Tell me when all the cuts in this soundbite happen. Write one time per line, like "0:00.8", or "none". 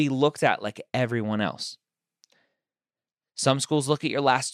none